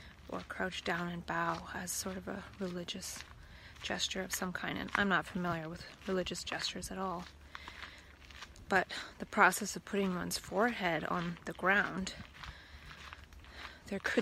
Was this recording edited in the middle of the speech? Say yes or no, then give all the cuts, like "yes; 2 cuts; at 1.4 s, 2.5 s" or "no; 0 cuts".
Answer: no; 0 cuts